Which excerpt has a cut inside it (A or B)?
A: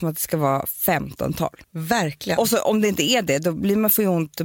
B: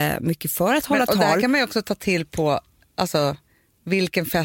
A